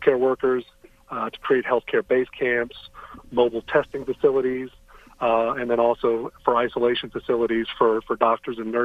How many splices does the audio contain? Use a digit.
0